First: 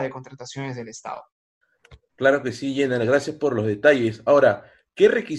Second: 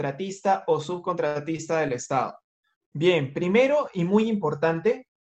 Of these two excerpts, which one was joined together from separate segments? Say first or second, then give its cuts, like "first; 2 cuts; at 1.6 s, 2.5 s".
second; 1 cut; at 2.8 s